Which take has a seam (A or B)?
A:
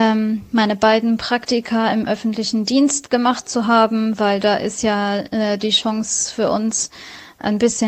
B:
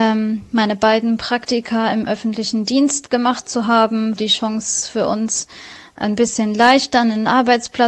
B